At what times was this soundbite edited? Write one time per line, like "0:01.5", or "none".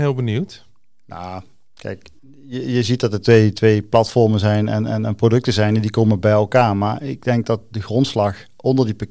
none